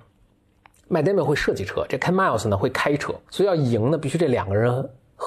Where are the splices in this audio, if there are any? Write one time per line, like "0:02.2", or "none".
0:03.3